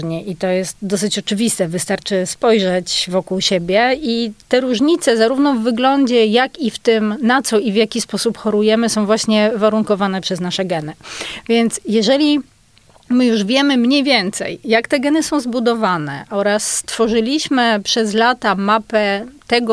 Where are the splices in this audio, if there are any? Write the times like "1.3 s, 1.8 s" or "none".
none